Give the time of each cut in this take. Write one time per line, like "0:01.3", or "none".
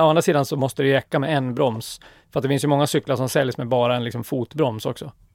none